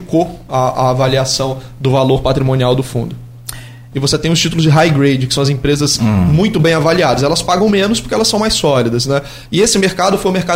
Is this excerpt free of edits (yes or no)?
no